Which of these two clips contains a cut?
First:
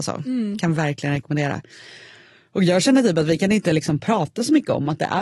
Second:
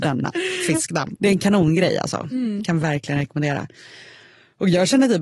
second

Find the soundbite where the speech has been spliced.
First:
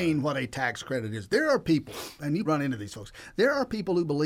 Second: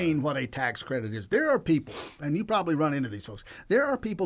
first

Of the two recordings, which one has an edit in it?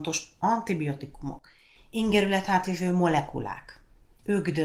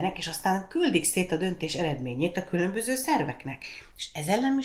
first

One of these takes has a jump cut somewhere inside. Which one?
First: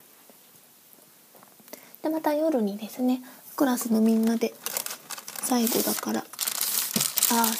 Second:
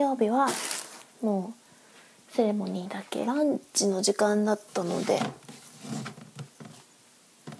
second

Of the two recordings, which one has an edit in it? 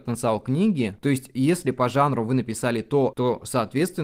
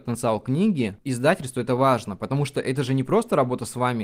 first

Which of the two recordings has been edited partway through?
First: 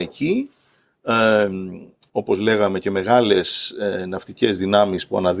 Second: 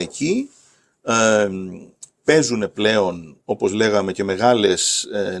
first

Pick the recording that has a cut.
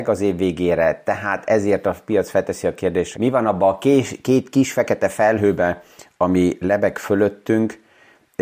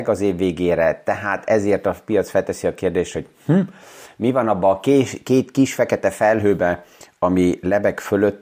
first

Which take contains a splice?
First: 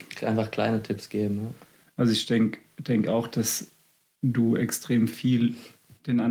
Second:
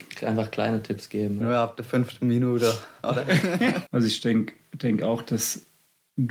second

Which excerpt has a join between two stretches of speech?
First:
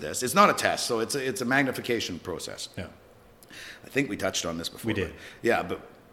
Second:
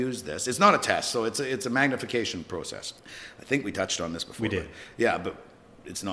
second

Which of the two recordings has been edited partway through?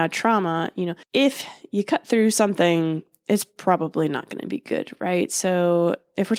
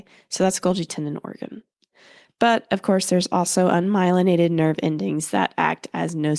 first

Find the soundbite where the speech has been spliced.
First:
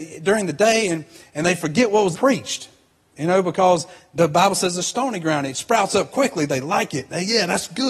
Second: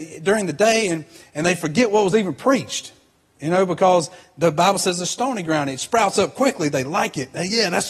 first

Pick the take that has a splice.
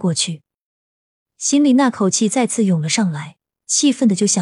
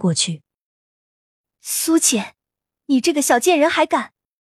first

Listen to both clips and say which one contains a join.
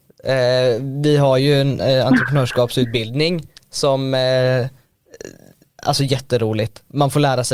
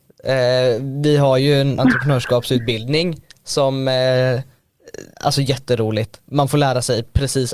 second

